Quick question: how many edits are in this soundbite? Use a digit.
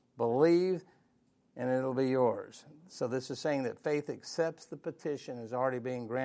0